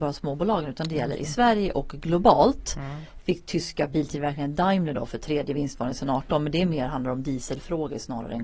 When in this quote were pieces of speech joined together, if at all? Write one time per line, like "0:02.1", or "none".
none

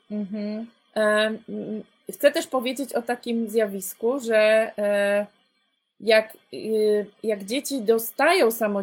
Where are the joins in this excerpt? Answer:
none

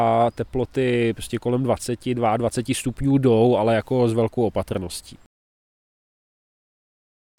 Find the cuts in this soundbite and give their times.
none

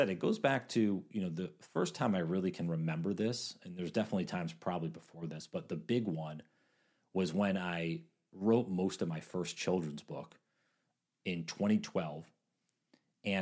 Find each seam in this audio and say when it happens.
none

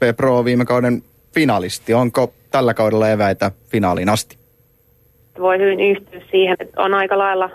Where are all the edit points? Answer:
0:05.3
0:06.5

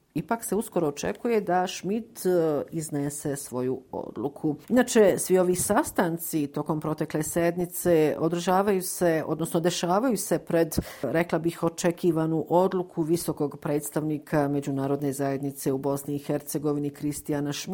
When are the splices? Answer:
0:04.6

